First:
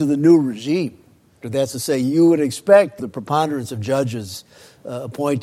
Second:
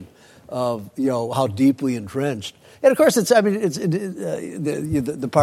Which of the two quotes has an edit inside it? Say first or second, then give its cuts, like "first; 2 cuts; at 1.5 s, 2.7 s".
first; 2 cuts; at 1.4 s, 3.0 s